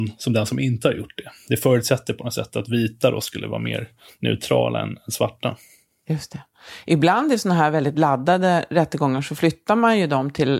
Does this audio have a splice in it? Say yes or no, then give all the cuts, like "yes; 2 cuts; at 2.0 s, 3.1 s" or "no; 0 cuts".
no; 0 cuts